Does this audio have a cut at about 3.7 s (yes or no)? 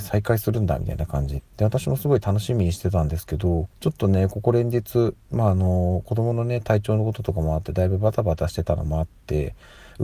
yes